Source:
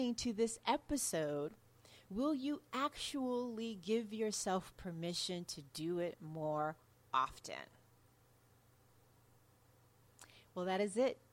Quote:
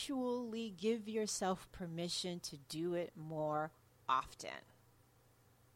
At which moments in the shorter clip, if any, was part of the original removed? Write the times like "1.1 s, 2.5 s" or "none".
none